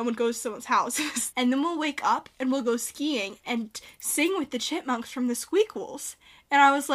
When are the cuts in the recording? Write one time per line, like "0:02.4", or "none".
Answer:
0:01.3